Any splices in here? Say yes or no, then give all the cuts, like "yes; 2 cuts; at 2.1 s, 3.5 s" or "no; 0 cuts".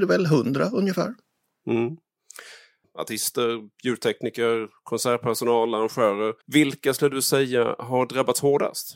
yes; 2 cuts; at 2.8 s, 6.4 s